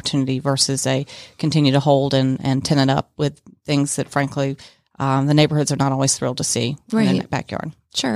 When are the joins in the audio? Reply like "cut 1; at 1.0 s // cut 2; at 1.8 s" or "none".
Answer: none